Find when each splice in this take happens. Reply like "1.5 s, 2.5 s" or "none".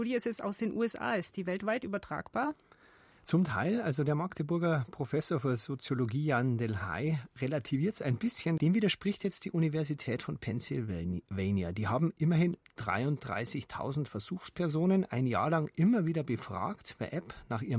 8.6 s